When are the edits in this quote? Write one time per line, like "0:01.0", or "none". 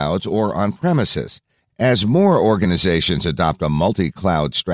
none

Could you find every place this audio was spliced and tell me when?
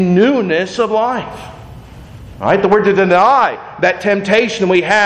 0:02.3

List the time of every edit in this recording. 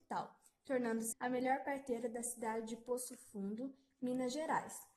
0:01.1

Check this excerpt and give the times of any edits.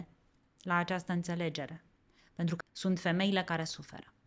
0:02.6

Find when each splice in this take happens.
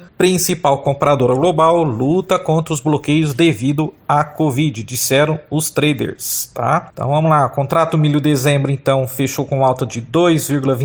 none

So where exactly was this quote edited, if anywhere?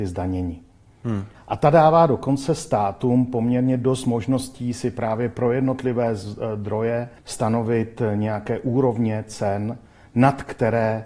0:01.3
0:07.2

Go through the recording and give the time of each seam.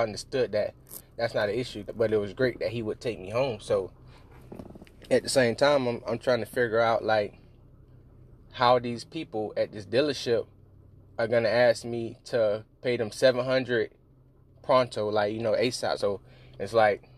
0:15.9

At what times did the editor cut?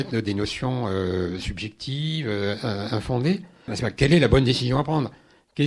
0:03.7

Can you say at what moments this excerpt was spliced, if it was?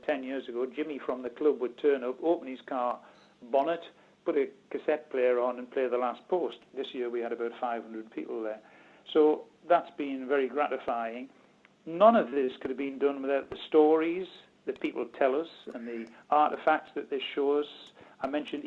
none

